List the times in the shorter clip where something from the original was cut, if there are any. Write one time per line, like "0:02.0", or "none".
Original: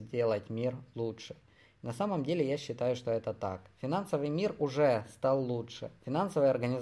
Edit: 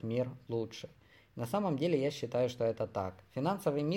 none